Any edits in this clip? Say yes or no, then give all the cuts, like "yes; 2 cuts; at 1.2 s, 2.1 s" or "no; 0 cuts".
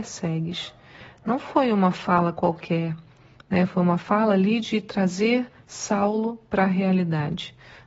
no; 0 cuts